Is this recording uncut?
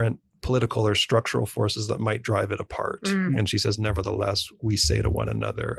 no; 1 cut; at 3.3 s

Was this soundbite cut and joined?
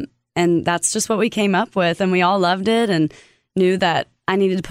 no; 0 cuts

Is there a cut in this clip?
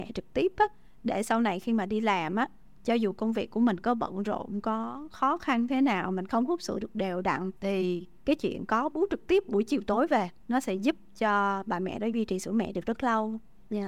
yes; 2 cuts; at 7.6 s, 10.4 s

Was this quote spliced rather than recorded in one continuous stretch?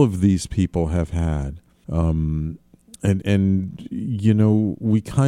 yes; 2 cuts; at 1.8 s, 3.2 s

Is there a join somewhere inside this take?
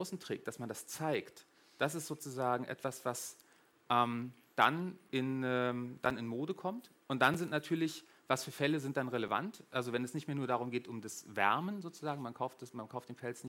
no; 0 cuts

